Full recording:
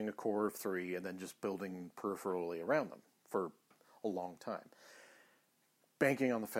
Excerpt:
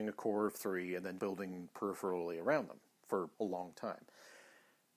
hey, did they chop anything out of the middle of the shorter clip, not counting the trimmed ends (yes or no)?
yes